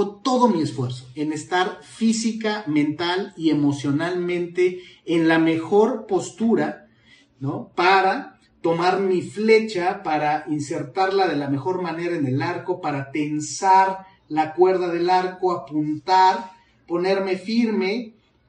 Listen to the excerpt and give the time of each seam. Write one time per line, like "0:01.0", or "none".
none

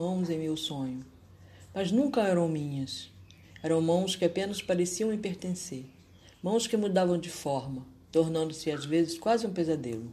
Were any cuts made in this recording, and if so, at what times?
none

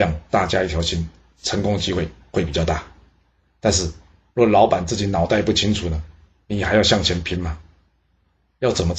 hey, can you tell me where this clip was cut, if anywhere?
none

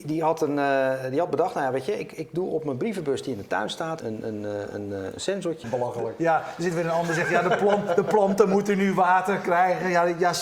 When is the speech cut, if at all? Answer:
0:04.0
0:05.6

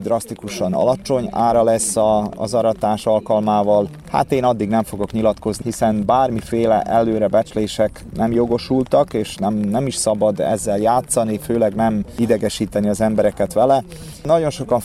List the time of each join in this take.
0:04.0
0:05.6

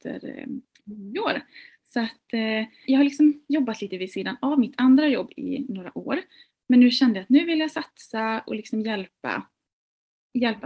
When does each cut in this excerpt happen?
0:02.9

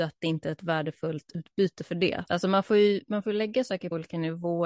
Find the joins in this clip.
0:02.3

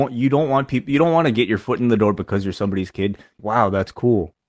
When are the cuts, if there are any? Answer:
0:03.4

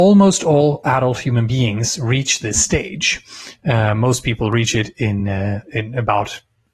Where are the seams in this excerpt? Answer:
none

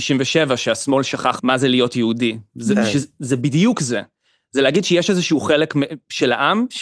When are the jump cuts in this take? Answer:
none

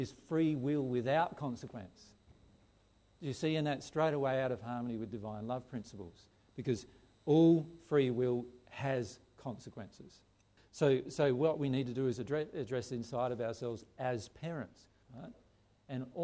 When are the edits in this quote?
0:10.6
0:15.0

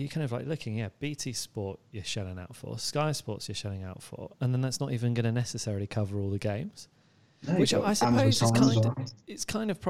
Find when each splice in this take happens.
none

